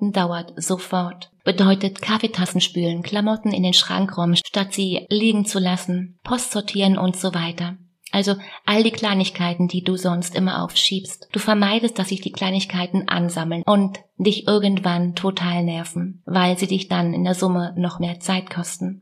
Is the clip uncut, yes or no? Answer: yes